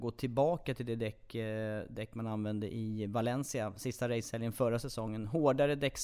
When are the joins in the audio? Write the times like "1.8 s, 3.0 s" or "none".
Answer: none